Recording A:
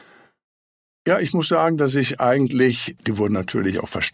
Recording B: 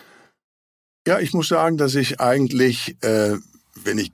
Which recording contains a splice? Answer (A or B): A